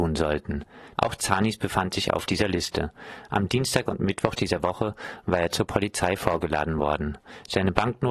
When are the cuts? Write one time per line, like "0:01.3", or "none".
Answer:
0:00.9